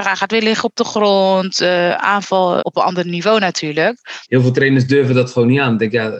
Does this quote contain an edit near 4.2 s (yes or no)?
yes